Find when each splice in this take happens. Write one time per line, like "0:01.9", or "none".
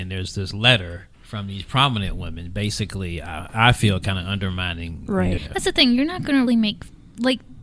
0:01.1
0:05.4
0:06.5